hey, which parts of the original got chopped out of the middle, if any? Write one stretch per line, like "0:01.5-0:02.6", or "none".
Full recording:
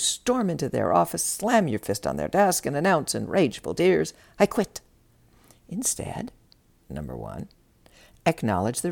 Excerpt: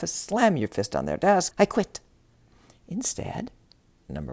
0:02.6-0:04.3

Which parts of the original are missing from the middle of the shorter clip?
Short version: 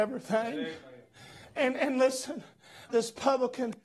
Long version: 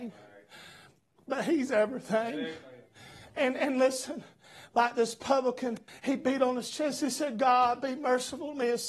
0:04.7-0:04.9

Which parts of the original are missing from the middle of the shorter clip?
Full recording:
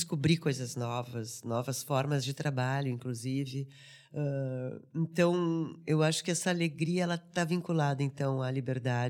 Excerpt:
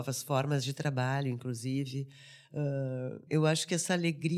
0:04.9-0:05.8

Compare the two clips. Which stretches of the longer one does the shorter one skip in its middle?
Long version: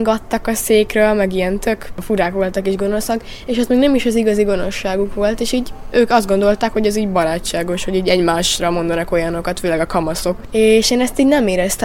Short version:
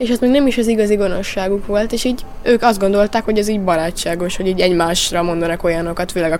none

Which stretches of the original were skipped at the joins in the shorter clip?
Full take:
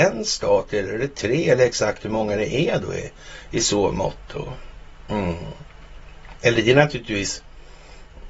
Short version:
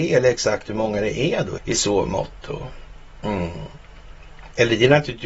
0:02.9-0:03.4

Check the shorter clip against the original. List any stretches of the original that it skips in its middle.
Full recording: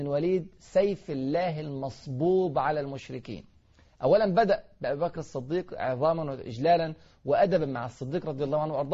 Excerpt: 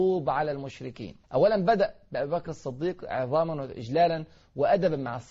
0:03.5-0:03.9

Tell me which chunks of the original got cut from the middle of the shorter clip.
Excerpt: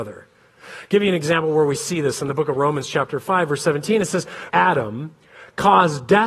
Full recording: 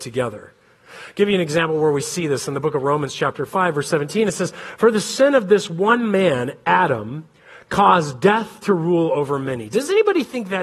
0:04.8-0:06.6

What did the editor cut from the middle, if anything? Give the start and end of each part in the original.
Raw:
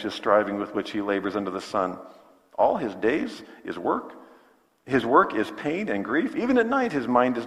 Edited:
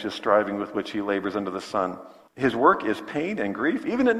0:02.3-0:04.8

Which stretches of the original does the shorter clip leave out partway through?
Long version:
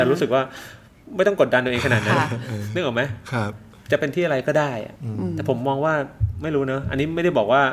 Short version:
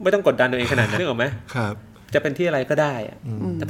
0:02.1-0:02.7

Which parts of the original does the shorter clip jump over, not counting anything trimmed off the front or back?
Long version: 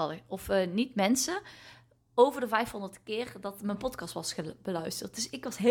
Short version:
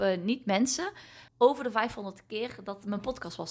0:01.8-0:02.0

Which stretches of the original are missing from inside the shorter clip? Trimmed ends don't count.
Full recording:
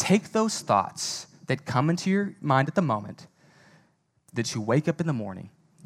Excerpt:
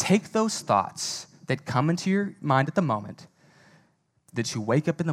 none

